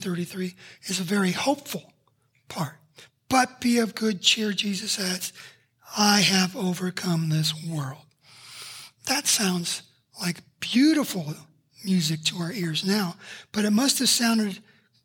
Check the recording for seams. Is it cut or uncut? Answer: uncut